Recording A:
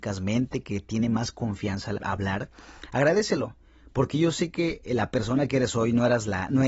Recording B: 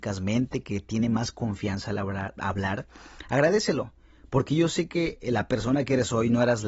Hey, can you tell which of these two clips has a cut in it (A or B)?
A